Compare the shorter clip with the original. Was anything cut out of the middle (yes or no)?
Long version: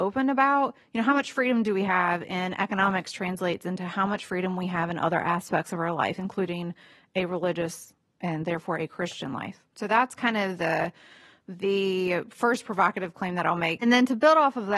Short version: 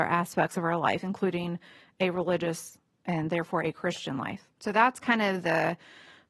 no